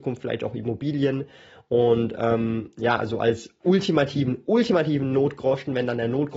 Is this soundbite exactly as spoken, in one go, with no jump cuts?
yes; 0 cuts

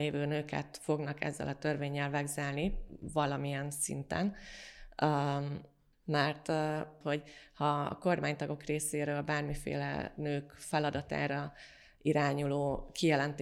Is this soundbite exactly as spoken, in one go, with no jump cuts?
no; 2 cuts; at 5.9 s, 7.0 s

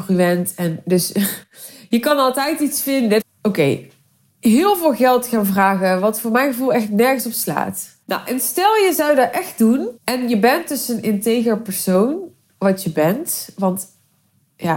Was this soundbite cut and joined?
yes; 3 cuts; at 3.2 s, 8.0 s, 10.0 s

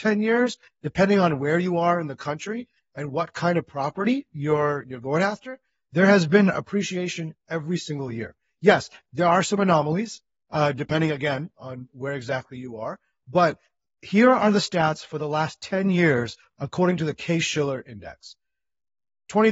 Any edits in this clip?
no; 0 cuts

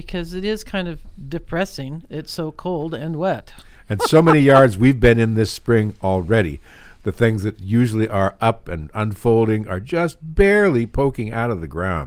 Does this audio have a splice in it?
no; 0 cuts

